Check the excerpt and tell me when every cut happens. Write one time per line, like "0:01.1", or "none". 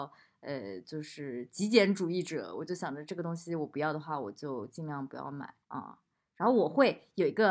0:05.6